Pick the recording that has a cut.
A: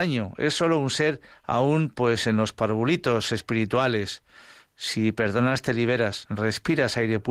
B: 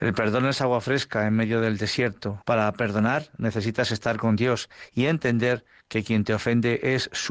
B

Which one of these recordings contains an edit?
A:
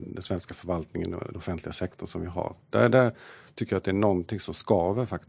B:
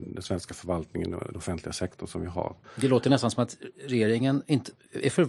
B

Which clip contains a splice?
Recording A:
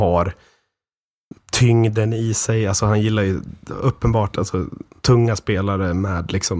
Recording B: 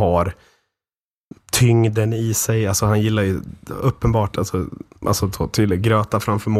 B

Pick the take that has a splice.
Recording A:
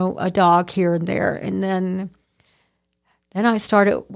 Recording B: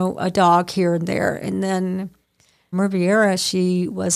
B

